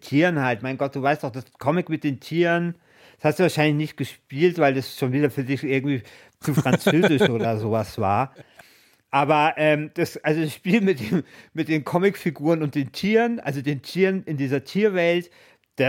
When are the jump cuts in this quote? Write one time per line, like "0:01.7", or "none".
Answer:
none

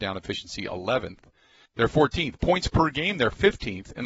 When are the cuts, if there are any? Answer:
0:01.6

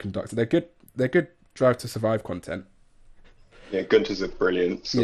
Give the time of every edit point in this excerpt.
0:03.2

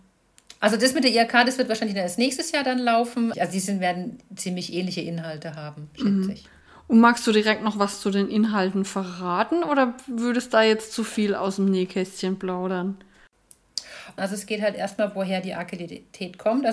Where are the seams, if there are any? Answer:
0:03.3
0:14.2

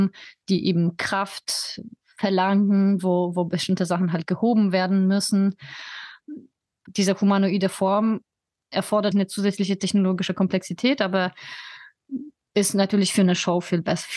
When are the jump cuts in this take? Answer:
0:06.9
0:09.1

